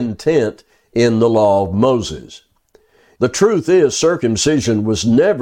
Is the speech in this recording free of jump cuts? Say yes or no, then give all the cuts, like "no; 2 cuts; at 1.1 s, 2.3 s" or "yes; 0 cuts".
no; 1 cut; at 3.1 s